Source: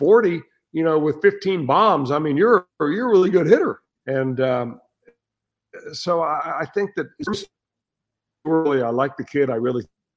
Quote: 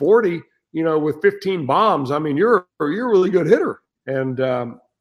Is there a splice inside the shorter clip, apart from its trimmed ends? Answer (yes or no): no